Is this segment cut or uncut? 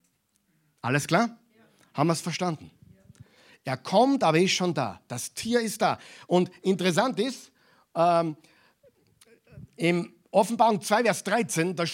uncut